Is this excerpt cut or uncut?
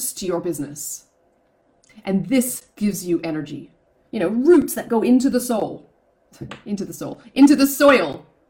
cut